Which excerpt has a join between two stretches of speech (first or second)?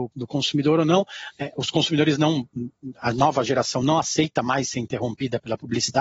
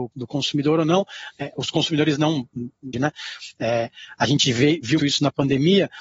second